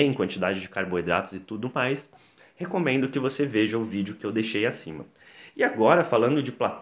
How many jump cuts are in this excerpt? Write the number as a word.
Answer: zero